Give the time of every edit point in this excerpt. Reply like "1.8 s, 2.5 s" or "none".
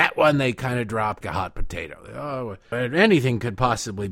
1.2 s, 2.7 s